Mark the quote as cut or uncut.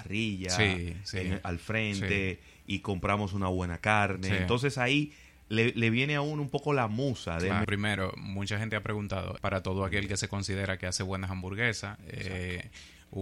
cut